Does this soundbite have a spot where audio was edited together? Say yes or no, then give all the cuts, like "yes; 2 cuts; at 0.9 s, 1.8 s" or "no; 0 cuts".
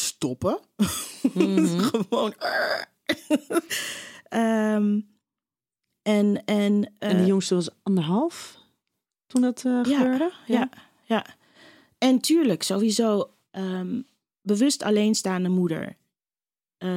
no; 0 cuts